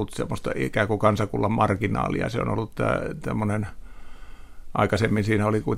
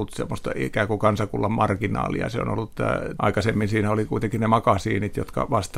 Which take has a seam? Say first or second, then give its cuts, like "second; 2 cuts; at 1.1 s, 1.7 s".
second; 1 cut; at 3.2 s